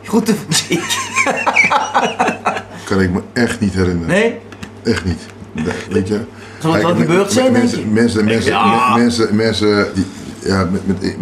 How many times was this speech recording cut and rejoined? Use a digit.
2